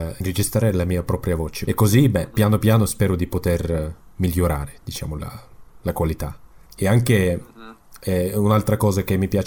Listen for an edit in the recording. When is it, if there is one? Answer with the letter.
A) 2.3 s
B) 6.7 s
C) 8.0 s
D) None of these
B